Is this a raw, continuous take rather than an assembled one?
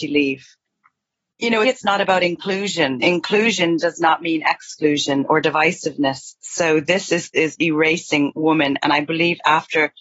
no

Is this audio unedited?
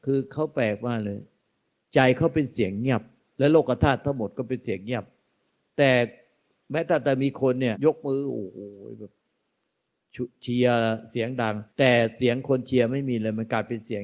no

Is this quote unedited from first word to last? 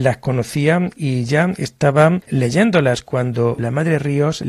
yes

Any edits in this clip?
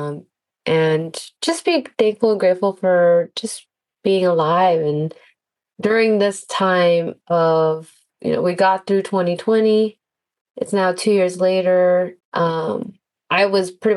yes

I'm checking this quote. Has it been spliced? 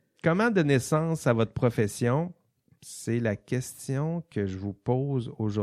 no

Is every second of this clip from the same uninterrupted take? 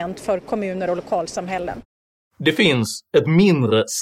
yes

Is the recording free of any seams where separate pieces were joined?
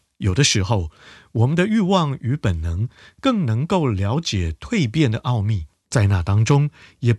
no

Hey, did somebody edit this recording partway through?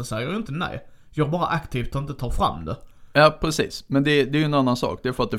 no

